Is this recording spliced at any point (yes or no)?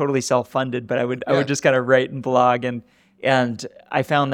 no